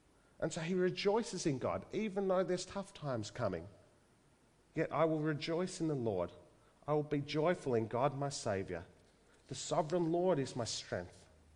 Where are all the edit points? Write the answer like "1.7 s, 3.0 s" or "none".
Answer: 4.5 s